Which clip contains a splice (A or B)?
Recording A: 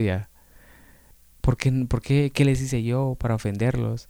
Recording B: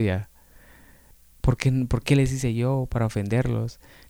B